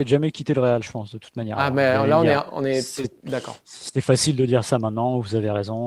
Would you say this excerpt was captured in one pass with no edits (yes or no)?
yes